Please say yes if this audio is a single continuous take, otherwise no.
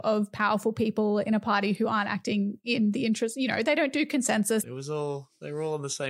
no